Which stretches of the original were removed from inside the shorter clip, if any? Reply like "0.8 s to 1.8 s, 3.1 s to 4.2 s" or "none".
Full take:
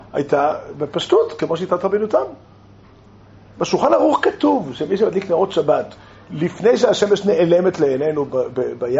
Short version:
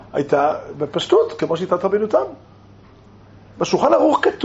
none